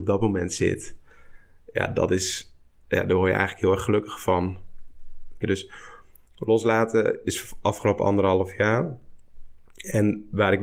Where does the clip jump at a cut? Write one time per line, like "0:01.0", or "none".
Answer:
0:05.4